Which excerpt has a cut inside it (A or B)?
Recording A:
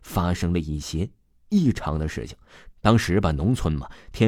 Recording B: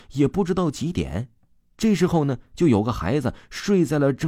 A